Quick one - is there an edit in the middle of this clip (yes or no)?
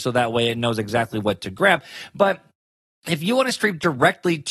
no